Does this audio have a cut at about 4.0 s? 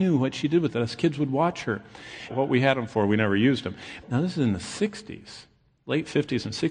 yes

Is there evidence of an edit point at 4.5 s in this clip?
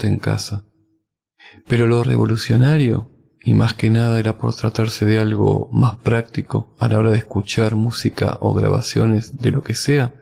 no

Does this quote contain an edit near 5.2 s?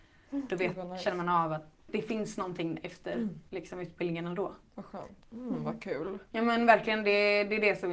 yes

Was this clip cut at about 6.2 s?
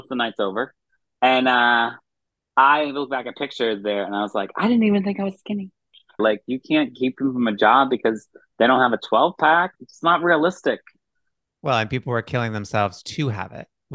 yes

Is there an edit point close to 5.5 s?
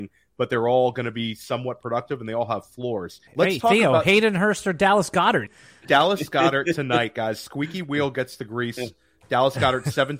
yes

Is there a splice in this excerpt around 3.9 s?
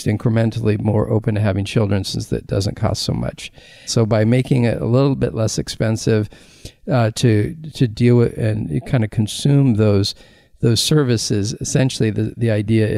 yes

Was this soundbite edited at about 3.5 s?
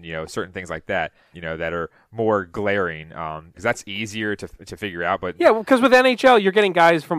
yes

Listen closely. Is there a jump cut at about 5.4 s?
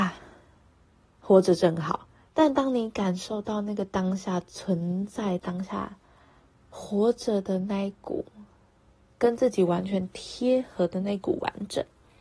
yes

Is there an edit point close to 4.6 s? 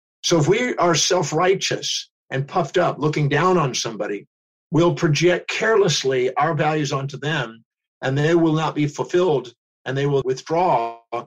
no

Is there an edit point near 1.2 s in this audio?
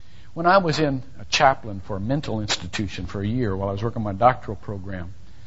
yes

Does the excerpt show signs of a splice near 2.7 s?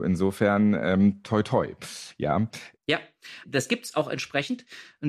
yes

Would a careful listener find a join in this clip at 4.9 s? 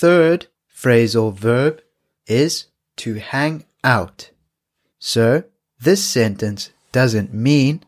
yes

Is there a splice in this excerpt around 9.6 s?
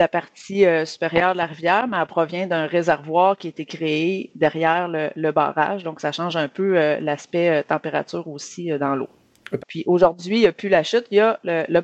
yes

